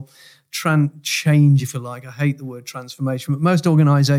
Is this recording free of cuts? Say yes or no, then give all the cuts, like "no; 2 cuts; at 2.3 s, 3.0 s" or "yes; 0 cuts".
yes; 0 cuts